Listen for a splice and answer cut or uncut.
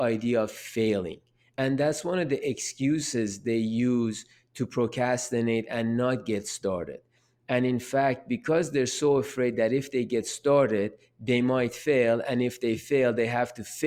uncut